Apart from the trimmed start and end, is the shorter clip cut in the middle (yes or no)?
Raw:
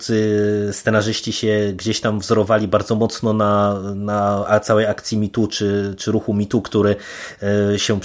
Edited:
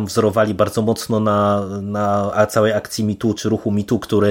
yes